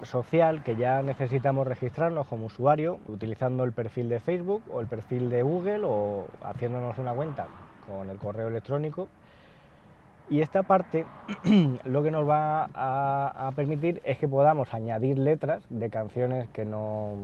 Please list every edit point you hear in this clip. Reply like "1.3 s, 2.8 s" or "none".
3.1 s